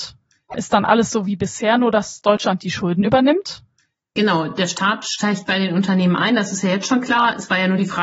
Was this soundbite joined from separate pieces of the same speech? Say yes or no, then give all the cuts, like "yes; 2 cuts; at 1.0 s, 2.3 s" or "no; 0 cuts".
no; 0 cuts